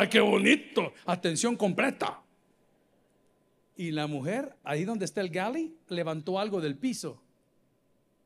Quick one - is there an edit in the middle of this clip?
no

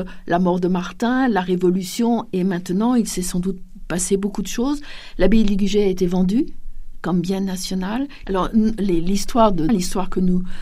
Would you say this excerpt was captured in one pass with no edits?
no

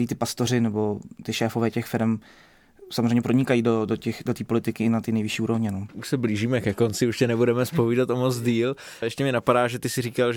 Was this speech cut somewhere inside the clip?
yes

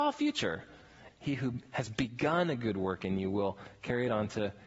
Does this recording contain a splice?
yes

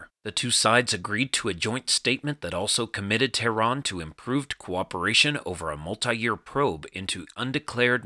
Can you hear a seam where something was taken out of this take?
no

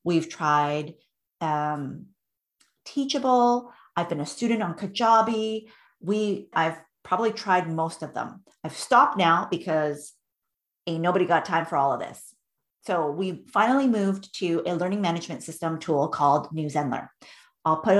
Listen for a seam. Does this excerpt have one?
yes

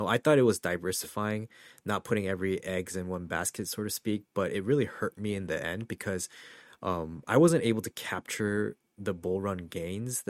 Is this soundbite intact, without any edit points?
yes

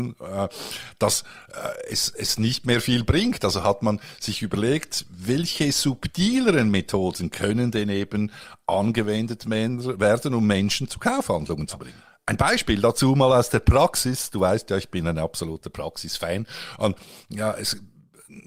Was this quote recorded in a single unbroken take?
yes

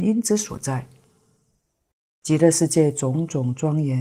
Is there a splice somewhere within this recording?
no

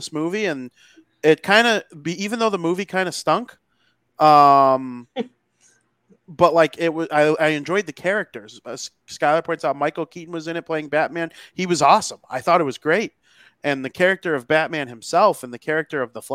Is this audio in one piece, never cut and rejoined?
yes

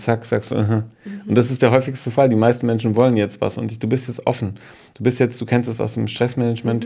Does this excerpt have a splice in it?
no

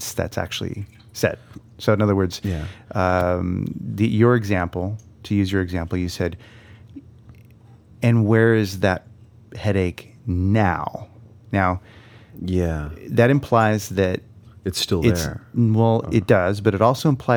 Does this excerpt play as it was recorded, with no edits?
yes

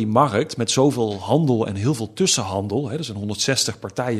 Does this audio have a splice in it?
no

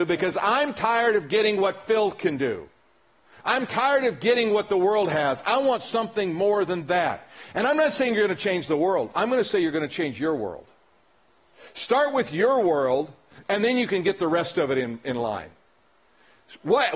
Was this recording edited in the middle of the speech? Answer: no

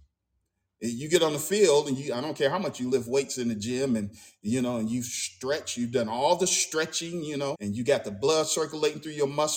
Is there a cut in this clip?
yes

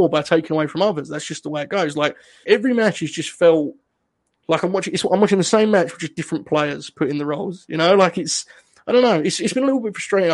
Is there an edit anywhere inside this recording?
yes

